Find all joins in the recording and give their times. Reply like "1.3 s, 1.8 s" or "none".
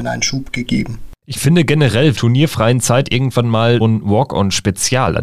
2.2 s, 3.8 s